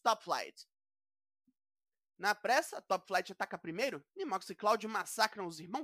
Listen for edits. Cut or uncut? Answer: uncut